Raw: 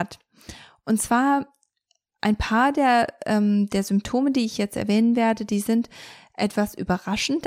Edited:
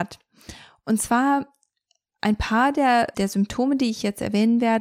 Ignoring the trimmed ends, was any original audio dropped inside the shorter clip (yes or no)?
yes